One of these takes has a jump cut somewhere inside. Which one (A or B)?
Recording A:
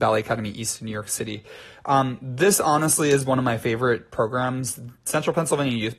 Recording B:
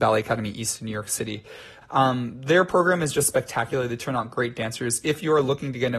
B